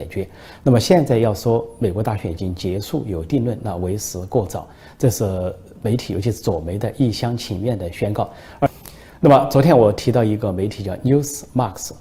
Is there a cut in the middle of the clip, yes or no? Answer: no